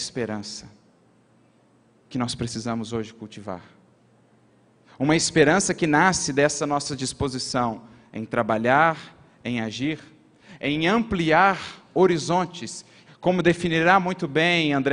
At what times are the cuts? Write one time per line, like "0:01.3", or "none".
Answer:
0:13.1

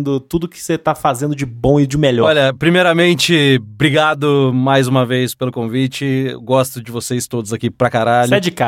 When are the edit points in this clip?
none

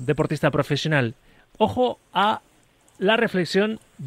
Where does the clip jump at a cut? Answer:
none

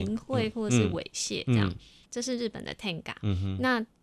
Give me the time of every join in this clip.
0:02.0

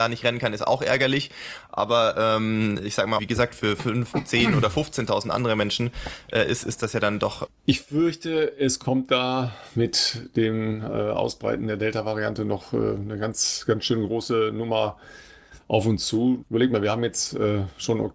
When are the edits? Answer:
0:03.2
0:07.5
0:16.4

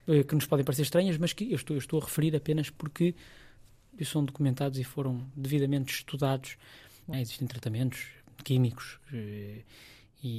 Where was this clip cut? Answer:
0:04.0
0:07.1

